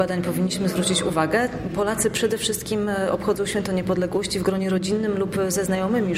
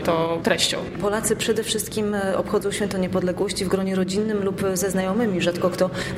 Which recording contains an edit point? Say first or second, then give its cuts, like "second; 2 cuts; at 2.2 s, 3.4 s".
second; 1 cut; at 0.9 s